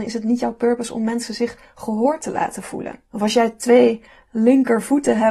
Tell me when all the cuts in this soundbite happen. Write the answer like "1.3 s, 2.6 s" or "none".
3.1 s